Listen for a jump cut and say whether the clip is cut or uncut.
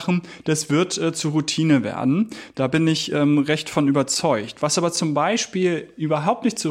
uncut